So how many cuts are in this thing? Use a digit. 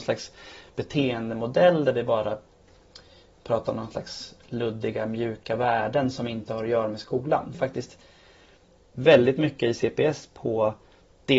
1